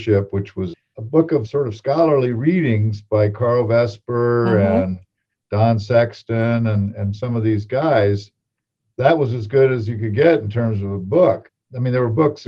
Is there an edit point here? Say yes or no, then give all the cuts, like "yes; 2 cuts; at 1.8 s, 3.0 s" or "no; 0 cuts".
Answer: no; 0 cuts